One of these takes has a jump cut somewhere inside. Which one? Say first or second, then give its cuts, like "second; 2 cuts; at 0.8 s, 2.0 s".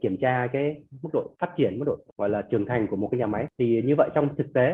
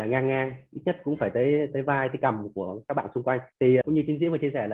second; 2 cuts; at 1.7 s, 3.8 s